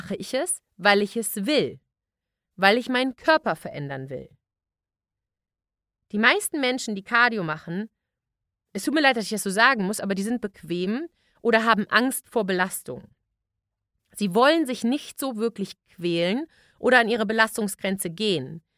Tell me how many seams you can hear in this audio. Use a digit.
0